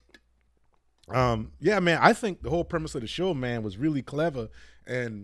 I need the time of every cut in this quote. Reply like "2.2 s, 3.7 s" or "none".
none